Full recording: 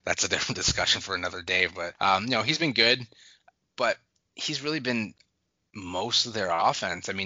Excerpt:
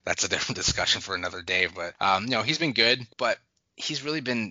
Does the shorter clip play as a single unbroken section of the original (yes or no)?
no